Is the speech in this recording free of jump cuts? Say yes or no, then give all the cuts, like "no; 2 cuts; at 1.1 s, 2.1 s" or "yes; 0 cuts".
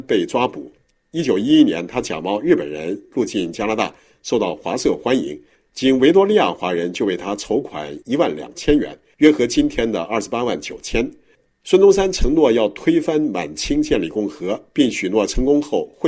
yes; 0 cuts